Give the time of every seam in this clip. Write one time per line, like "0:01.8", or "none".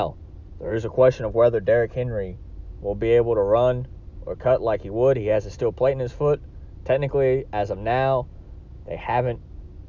none